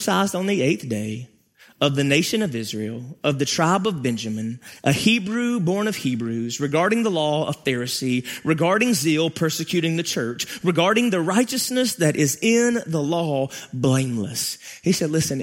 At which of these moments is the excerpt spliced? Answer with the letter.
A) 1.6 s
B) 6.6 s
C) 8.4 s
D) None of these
D